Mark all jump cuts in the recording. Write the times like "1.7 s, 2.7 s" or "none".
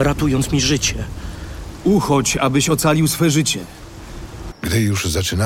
1.8 s, 4.5 s